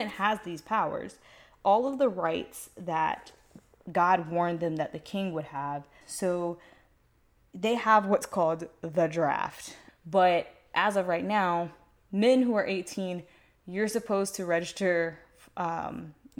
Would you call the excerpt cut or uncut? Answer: cut